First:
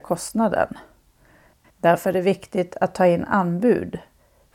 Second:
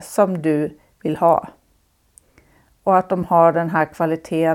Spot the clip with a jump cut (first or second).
first